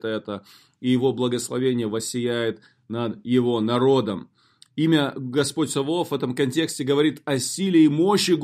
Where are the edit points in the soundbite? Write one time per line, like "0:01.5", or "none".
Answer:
none